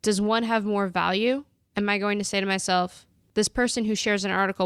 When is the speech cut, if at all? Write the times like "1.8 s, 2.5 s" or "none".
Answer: none